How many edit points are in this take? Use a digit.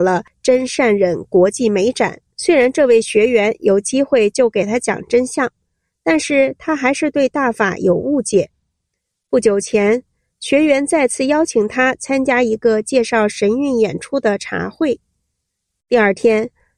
2